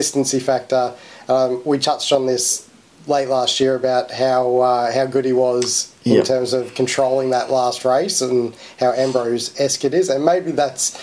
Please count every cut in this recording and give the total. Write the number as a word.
zero